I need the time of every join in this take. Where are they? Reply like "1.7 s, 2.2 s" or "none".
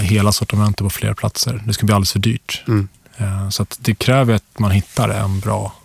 none